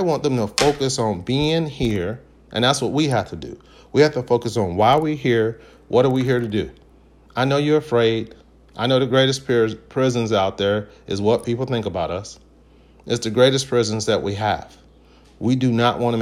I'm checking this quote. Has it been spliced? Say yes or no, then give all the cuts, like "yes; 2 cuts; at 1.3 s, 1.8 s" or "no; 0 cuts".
no; 0 cuts